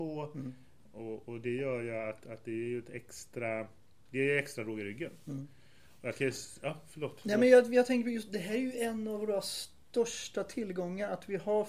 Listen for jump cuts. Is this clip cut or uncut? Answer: uncut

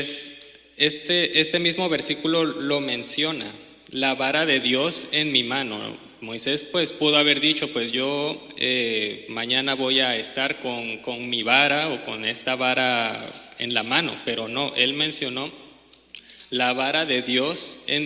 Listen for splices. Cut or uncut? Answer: uncut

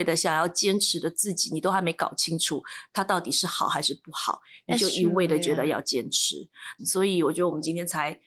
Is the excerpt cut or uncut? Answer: cut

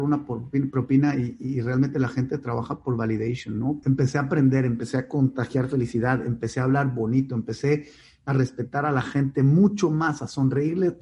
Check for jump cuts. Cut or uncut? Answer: cut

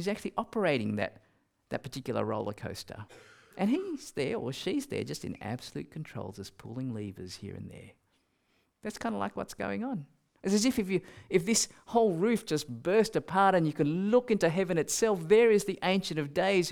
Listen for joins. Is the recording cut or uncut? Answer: cut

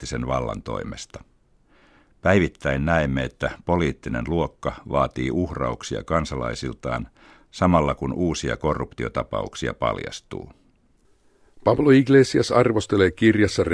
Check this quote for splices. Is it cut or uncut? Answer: uncut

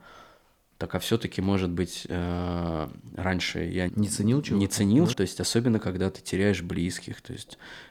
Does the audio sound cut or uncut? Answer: cut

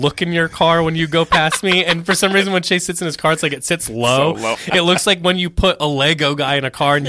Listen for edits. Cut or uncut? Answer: cut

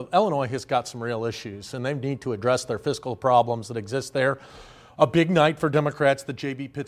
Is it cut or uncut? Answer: uncut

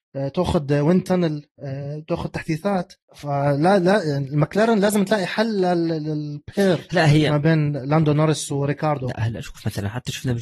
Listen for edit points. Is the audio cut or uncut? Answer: cut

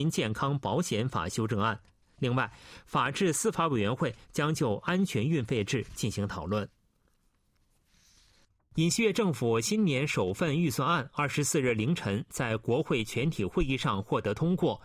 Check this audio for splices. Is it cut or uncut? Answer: uncut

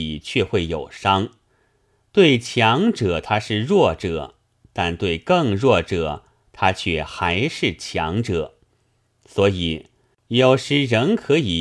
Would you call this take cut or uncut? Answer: cut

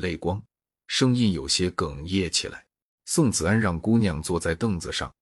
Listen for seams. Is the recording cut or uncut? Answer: cut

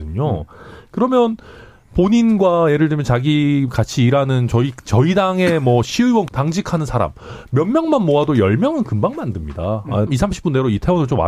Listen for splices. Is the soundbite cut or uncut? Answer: cut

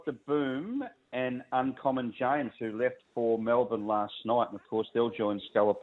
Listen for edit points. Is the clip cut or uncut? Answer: uncut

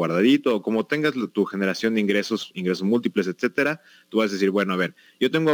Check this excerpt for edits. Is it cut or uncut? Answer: uncut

